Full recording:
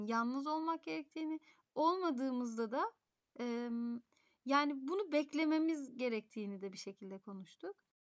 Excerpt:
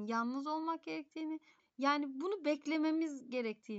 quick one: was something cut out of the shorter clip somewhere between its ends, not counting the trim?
yes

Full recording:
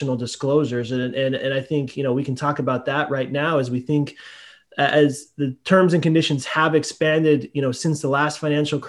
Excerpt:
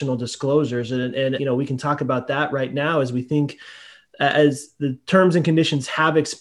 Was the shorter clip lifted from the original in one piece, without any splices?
no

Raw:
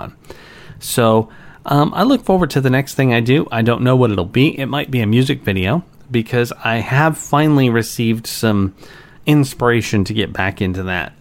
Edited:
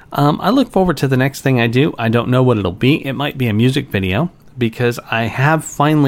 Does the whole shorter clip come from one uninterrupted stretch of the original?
yes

